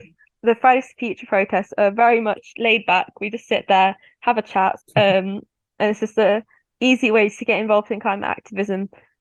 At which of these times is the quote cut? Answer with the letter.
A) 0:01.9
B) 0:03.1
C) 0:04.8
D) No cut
C